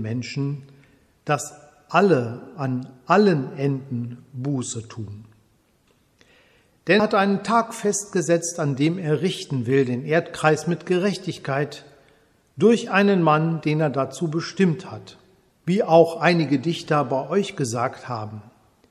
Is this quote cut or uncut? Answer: cut